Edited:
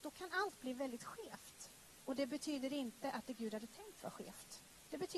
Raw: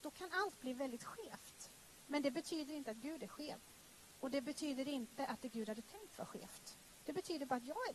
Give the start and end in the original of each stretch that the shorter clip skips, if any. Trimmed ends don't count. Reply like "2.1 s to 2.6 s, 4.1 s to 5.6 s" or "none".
2.1 s to 4.2 s

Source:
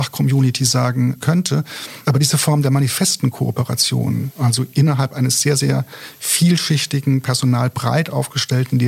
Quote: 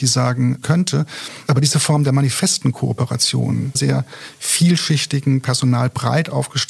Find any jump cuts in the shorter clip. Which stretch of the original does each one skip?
4.3 s to 5.6 s

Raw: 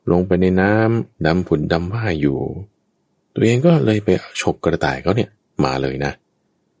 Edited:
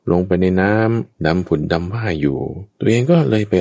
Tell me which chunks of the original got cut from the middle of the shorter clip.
2.7 s to 3.3 s

